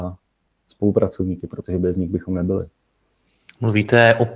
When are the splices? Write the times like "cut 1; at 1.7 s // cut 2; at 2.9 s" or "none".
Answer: none

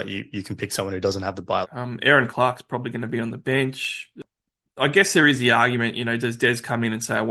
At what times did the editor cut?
cut 1; at 1.6 s

